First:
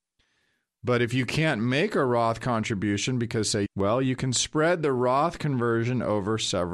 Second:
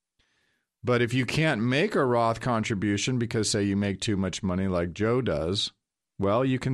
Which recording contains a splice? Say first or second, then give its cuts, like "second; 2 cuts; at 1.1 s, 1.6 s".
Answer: first; 1 cut; at 3.7 s